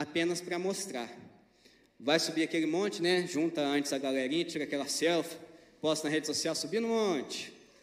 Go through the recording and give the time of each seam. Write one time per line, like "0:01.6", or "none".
none